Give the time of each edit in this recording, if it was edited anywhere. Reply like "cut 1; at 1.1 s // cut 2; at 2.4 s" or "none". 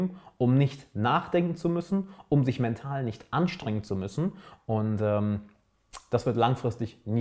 cut 1; at 4.6 s